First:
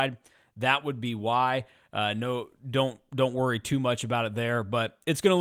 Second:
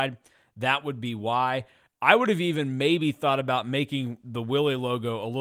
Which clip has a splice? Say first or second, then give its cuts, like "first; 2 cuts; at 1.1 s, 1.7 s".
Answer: second; 1 cut; at 1.9 s